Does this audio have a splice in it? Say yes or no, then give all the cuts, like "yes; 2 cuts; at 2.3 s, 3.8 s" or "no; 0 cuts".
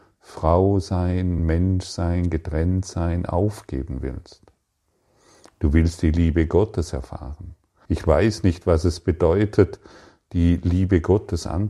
yes; 2 cuts; at 1.4 s, 7.9 s